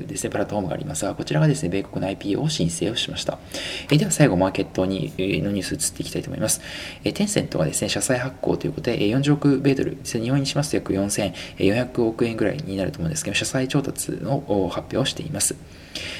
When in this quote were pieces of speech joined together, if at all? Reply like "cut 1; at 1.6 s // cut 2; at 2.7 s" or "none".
cut 1; at 3.9 s

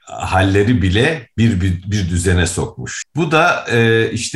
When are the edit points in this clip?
cut 1; at 3.0 s

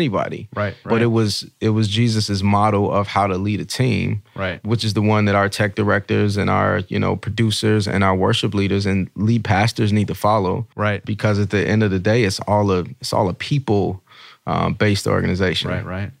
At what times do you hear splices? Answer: none

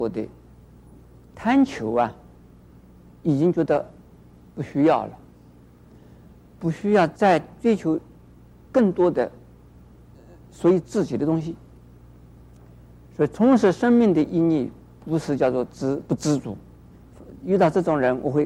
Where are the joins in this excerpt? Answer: cut 1; at 13.0 s // cut 2; at 16.9 s

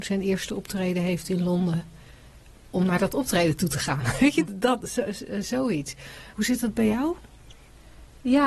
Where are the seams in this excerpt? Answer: cut 1; at 4.5 s // cut 2; at 6.3 s

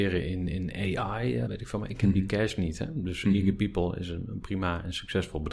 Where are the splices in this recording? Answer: cut 1; at 1.4 s

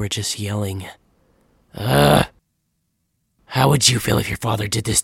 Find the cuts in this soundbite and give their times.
none

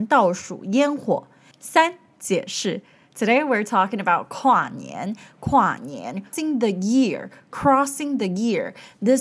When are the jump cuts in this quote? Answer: cut 1; at 1.5 s // cut 2; at 6.3 s

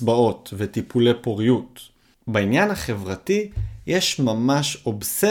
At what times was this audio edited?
none

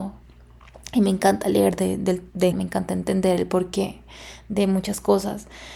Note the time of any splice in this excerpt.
cut 1; at 2.5 s

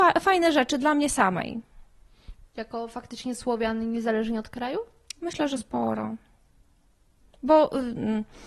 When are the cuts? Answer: cut 1; at 2.5 s

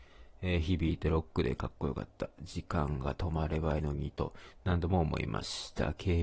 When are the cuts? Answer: cut 1; at 3.8 s

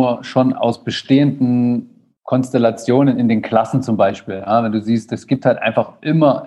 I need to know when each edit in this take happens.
cut 1; at 2.2 s

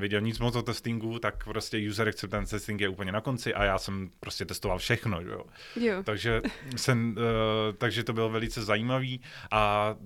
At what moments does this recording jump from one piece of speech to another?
none

